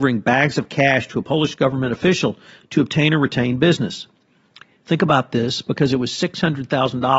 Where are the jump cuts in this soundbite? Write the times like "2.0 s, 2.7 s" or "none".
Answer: none